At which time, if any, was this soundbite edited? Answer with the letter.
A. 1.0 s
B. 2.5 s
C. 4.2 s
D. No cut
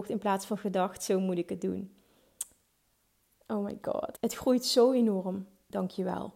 C